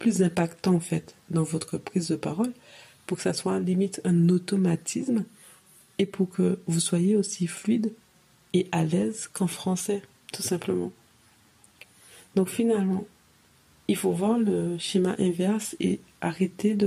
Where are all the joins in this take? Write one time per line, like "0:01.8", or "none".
none